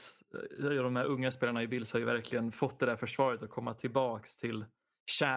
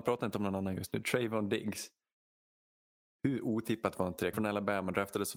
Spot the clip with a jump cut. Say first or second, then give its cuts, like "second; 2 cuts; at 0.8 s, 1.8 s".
second; 1 cut; at 4.3 s